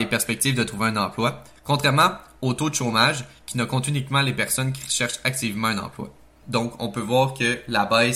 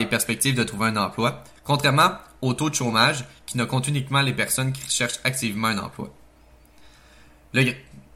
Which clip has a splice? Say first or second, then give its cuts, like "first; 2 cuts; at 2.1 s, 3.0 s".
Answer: first; 1 cut; at 6.4 s